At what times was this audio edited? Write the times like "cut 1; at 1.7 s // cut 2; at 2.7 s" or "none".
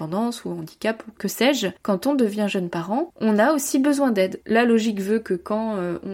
cut 1; at 1.2 s // cut 2; at 4.4 s